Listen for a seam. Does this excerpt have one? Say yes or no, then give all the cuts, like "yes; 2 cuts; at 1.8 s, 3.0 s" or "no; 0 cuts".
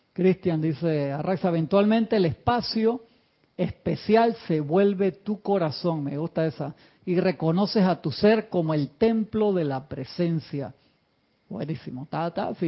yes; 1 cut; at 11.4 s